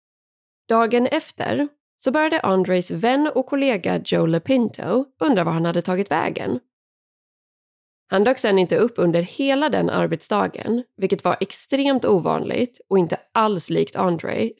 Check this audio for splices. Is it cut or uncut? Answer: cut